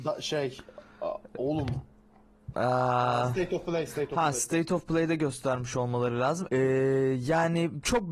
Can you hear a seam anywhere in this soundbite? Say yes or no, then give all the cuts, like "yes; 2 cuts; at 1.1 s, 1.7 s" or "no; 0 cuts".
yes; 1 cut; at 6.5 s